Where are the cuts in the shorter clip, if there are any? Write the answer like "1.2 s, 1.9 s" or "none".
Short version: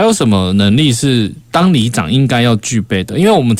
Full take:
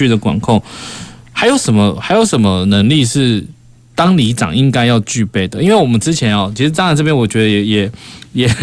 1.5 s